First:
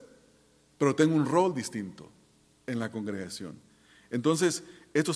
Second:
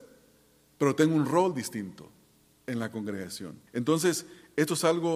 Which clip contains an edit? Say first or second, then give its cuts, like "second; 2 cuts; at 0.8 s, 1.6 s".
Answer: second; 1 cut; at 3.7 s